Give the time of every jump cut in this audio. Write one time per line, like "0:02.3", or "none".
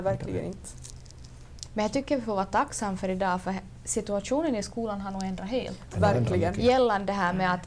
none